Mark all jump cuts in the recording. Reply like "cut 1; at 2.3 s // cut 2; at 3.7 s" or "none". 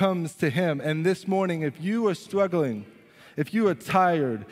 none